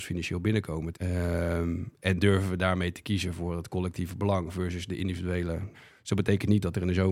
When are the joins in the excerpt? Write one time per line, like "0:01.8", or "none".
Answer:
0:00.9
0:05.7